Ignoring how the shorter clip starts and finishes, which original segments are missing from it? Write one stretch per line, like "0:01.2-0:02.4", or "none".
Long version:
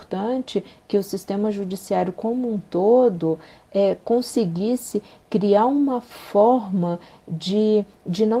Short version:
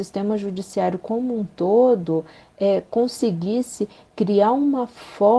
none